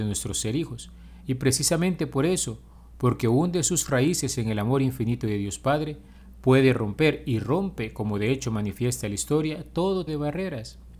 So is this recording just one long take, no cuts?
no; 1 cut; at 10.1 s

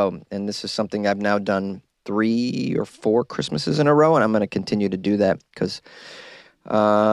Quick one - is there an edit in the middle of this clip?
no; 0 cuts

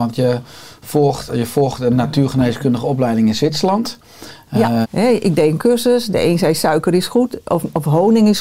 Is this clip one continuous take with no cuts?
no; 2 cuts; at 1.3 s, 4.8 s

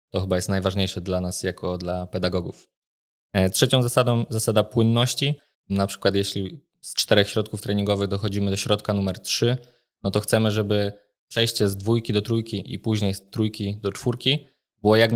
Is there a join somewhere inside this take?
yes; 1 cut; at 5.5 s

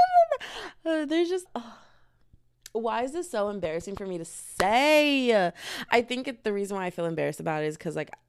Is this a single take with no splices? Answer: no; 1 cut; at 1.5 s

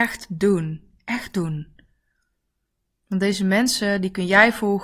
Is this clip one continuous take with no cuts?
yes; 0 cuts

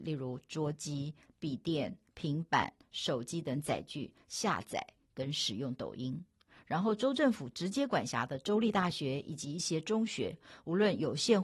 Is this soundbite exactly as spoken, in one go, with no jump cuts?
yes; 0 cuts

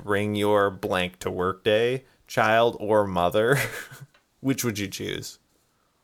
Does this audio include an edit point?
no; 0 cuts

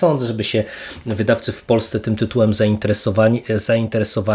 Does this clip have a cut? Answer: no; 0 cuts

